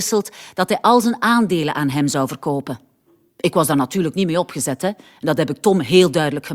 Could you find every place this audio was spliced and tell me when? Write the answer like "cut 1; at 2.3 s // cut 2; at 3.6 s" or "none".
none